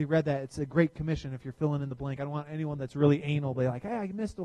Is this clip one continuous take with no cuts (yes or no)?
yes